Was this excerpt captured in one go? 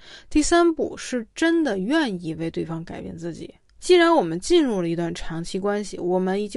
no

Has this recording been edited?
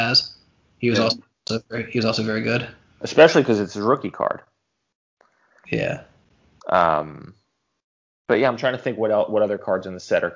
yes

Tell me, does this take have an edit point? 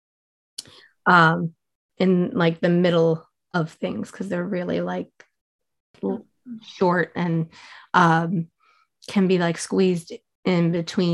no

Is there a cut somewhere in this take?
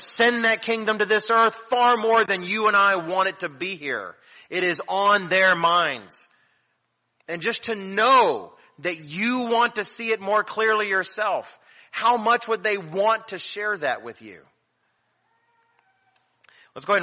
no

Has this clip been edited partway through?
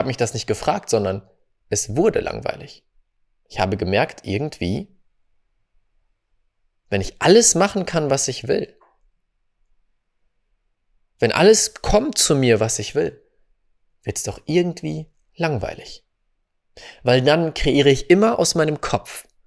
no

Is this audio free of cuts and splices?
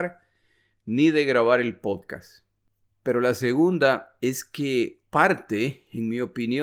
no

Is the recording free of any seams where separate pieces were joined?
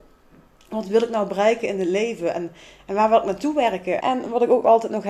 no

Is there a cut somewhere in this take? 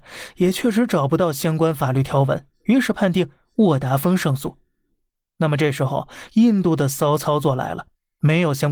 no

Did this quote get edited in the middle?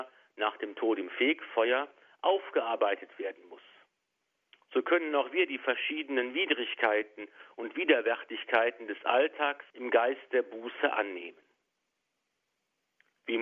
yes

